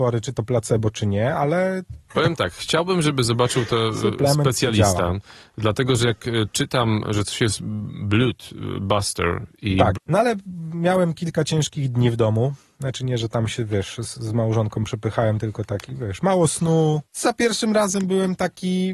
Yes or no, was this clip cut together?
yes